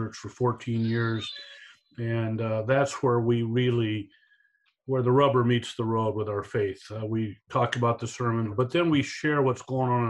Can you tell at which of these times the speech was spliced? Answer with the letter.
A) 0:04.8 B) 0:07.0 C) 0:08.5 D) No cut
C